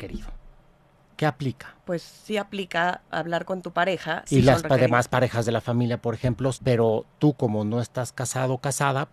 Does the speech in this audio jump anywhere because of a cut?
yes; 3 cuts; at 1.8 s, 4.3 s, 6.5 s

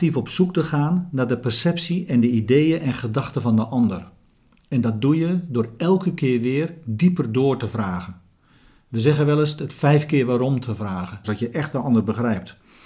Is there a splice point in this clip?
yes; 1 cut; at 11.2 s

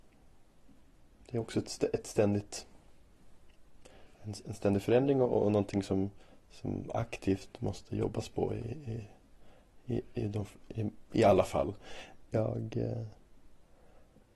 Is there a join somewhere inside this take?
yes; 1 cut; at 12.3 s

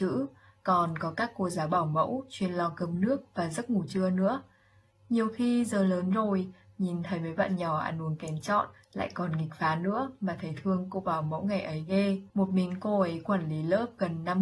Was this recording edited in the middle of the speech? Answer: yes; 1 cut; at 12.3 s

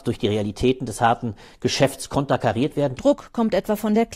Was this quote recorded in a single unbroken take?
no; 1 cut; at 3.0 s

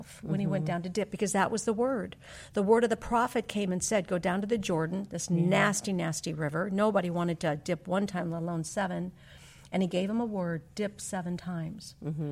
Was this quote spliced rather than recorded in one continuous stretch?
no; 0 cuts

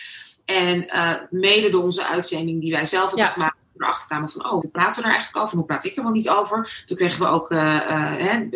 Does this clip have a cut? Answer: yes; 1 cut; at 4.6 s

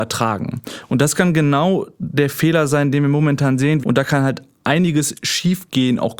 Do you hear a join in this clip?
yes; 1 cut; at 3.8 s

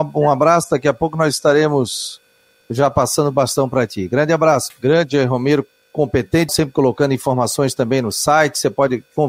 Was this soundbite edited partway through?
yes; 2 cuts; at 4.7 s, 6.5 s

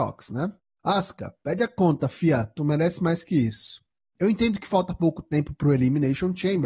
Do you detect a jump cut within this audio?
no; 0 cuts

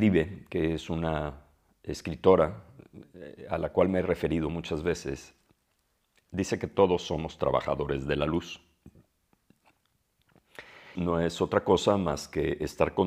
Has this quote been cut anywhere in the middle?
yes; 1 cut; at 10.9 s

